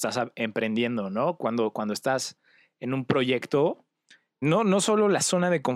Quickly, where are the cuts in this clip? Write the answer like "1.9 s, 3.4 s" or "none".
4.4 s